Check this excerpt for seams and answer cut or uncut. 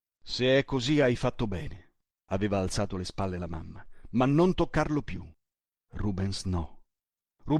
cut